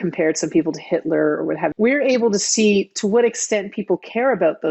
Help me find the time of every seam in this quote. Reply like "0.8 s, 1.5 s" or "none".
1.7 s

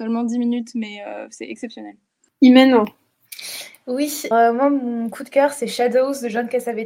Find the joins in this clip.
4.3 s

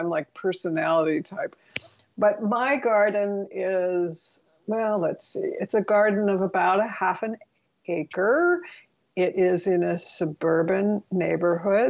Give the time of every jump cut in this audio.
none

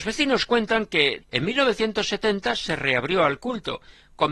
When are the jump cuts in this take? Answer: 1.2 s

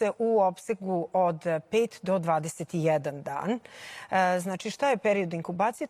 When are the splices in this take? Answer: none

